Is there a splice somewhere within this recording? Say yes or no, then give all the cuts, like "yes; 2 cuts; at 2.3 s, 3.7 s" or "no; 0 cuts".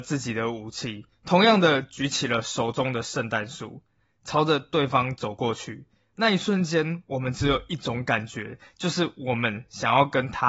yes; 1 cut; at 3.9 s